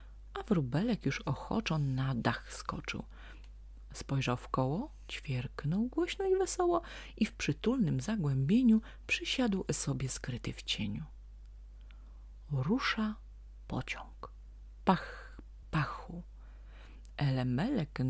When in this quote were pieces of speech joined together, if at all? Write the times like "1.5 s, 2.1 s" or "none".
15.6 s